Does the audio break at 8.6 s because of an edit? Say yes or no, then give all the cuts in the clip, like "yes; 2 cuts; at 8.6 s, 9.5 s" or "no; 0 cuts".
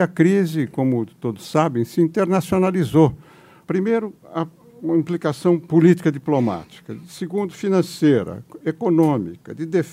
no; 1 cut; at 3.6 s